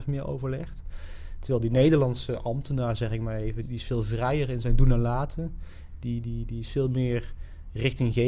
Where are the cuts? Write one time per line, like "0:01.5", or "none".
0:03.6